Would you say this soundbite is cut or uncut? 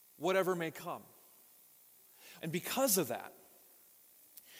cut